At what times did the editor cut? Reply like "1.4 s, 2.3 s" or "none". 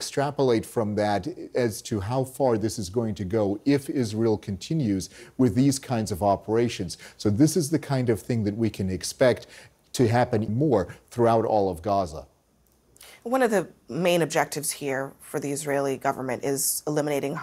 10.5 s